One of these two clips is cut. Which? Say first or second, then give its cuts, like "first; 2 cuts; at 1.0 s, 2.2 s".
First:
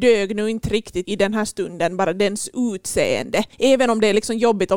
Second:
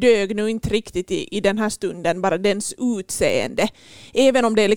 first; 2 cuts; at 1.0 s, 3.5 s